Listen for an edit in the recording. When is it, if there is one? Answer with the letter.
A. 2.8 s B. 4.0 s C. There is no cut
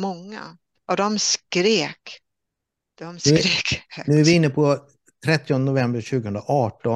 C